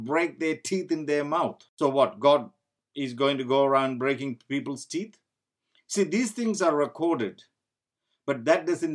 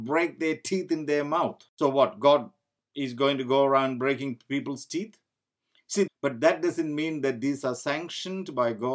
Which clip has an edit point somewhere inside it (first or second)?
second